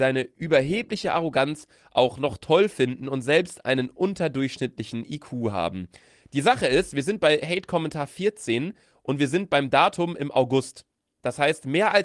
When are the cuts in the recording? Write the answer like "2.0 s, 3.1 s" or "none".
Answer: none